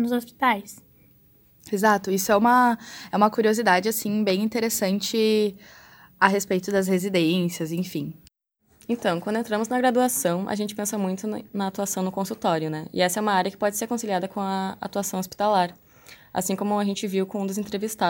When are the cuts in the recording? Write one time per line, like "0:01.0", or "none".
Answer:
none